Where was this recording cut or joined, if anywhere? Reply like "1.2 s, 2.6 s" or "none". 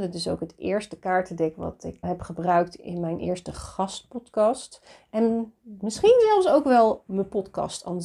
2.0 s